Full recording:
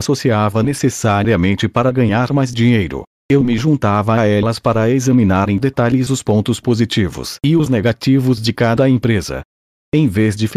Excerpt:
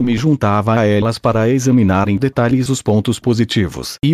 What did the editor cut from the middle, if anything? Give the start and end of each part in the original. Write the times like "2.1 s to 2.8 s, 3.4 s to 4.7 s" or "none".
none